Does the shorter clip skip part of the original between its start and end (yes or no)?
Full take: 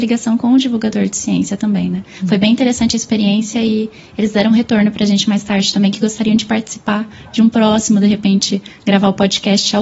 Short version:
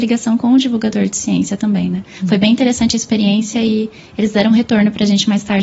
no